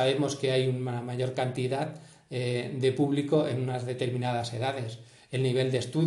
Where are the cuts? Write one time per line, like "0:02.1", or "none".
none